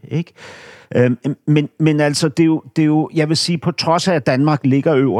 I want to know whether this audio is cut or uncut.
uncut